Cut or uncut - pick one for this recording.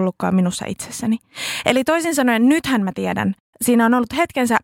uncut